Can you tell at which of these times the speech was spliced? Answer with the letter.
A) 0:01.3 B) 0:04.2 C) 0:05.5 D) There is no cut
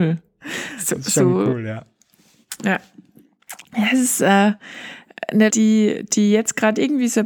C